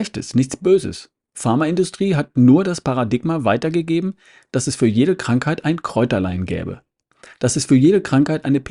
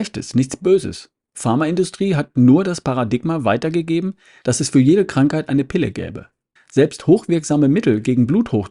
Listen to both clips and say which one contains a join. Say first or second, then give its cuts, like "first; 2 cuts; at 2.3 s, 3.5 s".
second; 2 cuts; at 4.4 s, 6.6 s